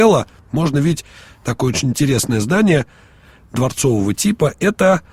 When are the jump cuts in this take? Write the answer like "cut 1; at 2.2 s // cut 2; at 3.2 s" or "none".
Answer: none